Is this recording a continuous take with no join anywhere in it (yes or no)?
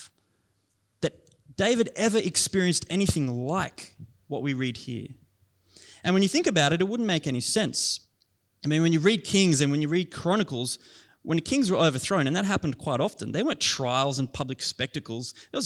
yes